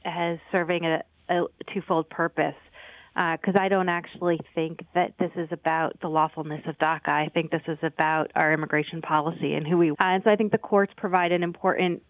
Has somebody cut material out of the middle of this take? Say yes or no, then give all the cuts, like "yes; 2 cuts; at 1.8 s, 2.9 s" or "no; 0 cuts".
yes; 1 cut; at 9.9 s